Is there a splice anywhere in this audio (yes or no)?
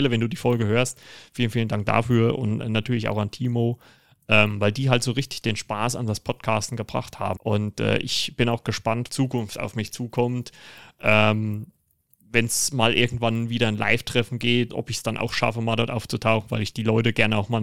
yes